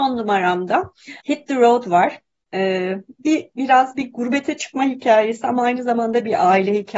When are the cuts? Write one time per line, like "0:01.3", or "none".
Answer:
0:01.2
0:02.5